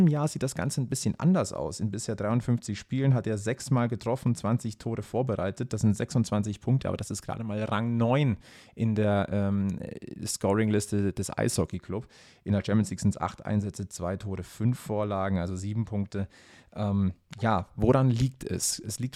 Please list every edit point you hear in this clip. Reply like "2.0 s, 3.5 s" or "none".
none